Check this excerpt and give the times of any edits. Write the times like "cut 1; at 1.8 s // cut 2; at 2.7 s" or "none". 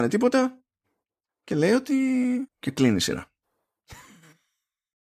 cut 1; at 1.3 s // cut 2; at 2.5 s